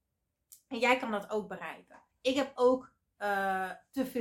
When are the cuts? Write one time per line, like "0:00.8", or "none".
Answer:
0:02.1